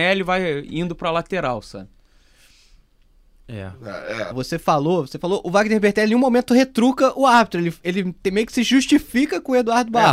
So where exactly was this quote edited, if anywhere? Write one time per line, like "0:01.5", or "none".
0:04.3